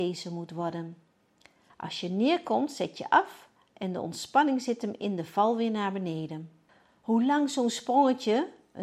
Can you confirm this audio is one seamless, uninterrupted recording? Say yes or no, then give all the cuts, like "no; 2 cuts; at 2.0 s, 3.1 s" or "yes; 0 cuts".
no; 1 cut; at 1.7 s